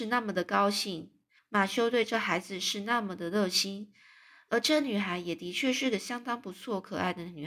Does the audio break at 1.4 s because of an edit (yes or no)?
yes